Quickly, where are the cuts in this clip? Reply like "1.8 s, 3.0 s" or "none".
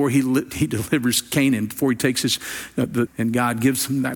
3.1 s